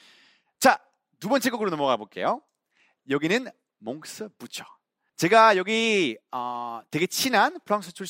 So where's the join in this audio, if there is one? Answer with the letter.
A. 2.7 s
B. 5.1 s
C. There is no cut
B